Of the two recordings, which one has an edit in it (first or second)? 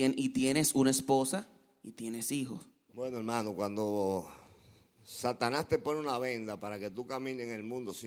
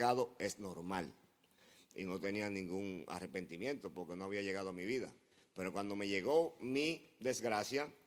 first